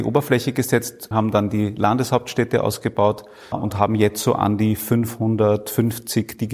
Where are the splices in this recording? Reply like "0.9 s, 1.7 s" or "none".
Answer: 1.1 s, 3.5 s